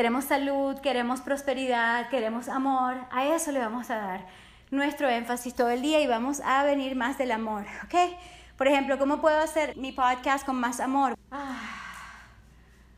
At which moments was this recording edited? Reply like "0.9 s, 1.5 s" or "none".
9.7 s, 11.1 s